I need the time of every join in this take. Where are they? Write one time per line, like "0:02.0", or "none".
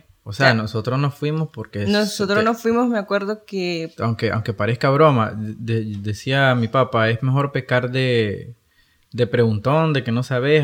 0:04.0